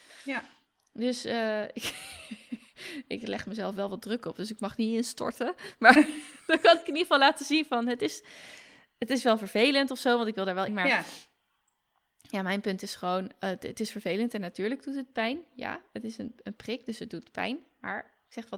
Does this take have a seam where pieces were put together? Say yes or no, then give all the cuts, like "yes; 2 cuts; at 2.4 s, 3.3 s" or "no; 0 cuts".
yes; 1 cut; at 10.7 s